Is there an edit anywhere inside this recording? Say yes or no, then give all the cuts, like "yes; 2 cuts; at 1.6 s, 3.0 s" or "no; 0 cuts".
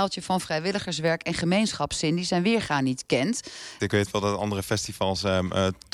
yes; 1 cut; at 3.8 s